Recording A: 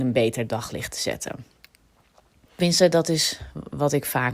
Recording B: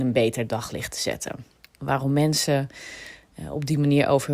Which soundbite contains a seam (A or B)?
B